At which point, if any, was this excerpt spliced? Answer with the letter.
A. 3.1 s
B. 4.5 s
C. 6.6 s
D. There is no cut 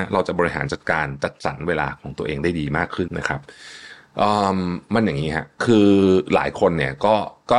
A